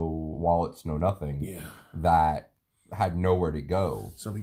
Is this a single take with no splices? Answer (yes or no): yes